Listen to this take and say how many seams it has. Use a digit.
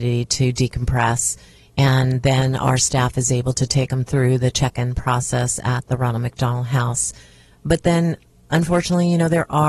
0